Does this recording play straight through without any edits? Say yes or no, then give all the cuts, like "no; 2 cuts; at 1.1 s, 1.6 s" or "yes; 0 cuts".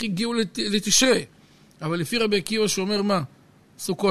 yes; 0 cuts